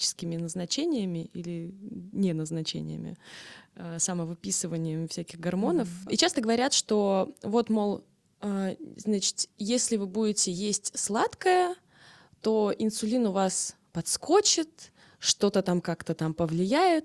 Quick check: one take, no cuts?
no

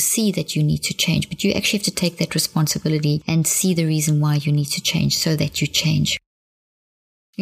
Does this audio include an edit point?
no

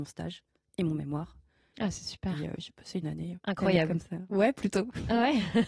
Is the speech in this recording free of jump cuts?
no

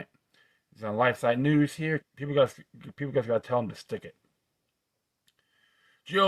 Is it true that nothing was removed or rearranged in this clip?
no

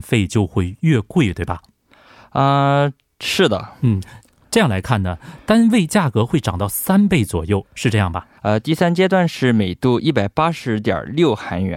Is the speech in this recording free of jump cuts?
no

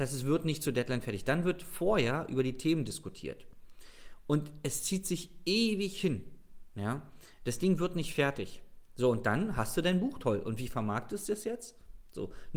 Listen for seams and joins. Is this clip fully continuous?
yes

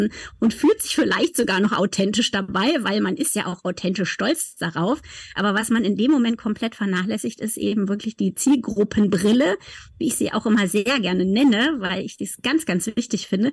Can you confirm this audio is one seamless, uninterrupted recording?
yes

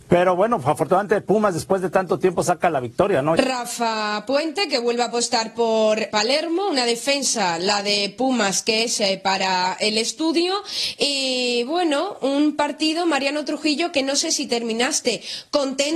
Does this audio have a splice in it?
yes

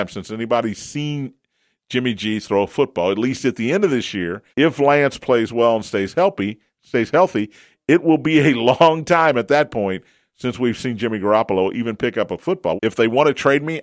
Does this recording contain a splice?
yes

